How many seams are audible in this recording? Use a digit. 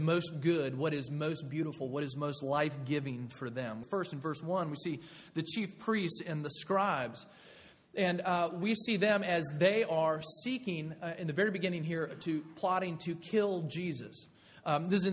1